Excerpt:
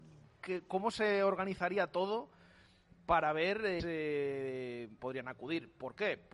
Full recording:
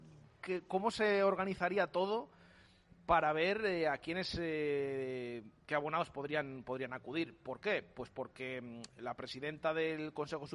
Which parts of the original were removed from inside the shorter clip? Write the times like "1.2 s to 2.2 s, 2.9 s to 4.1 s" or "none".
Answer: 3.8 s to 4.3 s, 5.5 s to 6.6 s